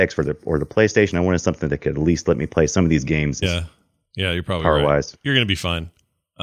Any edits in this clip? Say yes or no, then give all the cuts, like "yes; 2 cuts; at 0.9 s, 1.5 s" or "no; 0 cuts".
yes; 1 cut; at 3.4 s